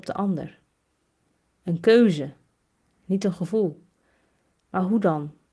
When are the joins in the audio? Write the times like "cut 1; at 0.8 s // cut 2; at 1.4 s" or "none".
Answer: cut 1; at 4.5 s